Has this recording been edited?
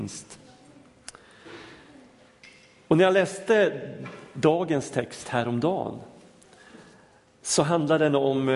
no; 0 cuts

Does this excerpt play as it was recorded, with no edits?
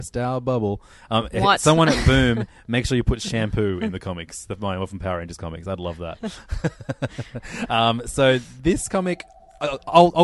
yes; 0 cuts

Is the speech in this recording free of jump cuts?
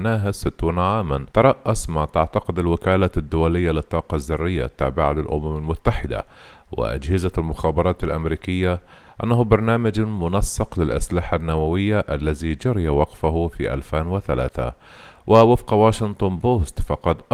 no; 1 cut; at 1.3 s

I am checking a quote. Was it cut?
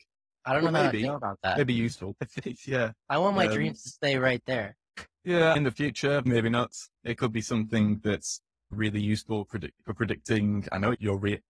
yes; 2 cuts; at 3.0 s, 7.0 s

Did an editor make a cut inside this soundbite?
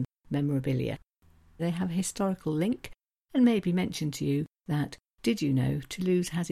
yes; 2 cuts; at 1.6 s, 3.3 s

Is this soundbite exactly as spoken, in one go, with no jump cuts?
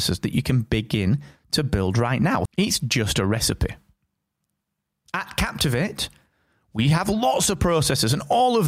no; 1 cut; at 2.5 s

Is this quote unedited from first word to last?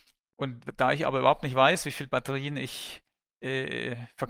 yes; 0 cuts

